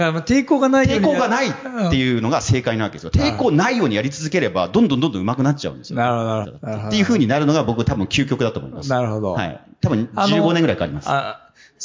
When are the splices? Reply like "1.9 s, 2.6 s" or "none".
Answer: 6.4 s